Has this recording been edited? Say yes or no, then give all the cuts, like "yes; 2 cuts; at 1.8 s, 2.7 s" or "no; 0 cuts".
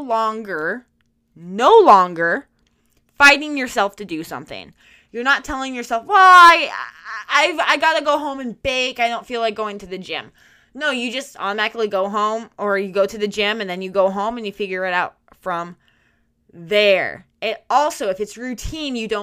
yes; 1 cut; at 7.3 s